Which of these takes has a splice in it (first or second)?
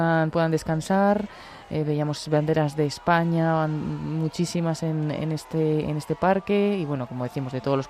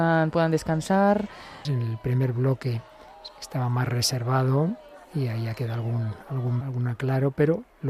second